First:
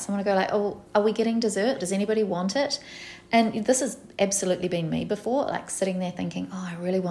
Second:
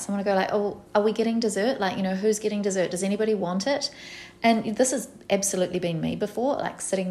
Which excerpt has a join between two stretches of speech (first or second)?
first